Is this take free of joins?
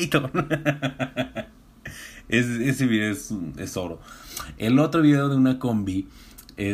yes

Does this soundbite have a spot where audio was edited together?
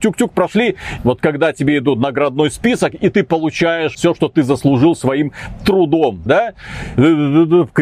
yes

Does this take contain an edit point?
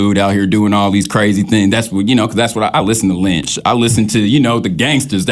no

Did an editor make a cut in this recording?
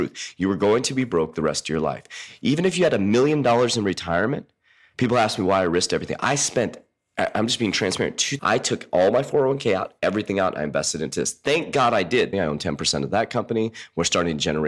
yes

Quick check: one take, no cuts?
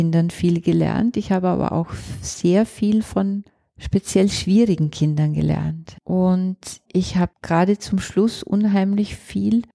yes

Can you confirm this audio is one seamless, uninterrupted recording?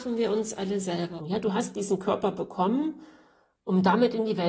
no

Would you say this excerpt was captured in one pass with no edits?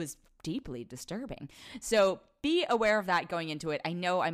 yes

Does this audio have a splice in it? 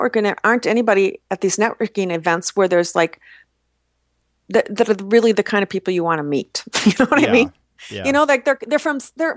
no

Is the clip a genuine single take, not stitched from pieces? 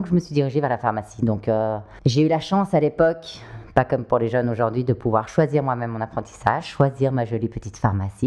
yes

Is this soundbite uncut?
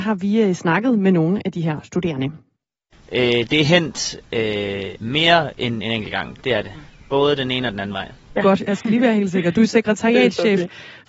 no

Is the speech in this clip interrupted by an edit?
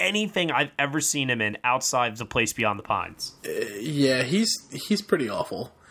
no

